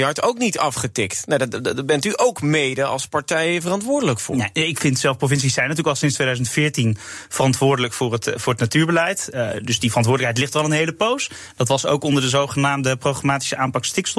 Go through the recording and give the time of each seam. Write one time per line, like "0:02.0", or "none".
none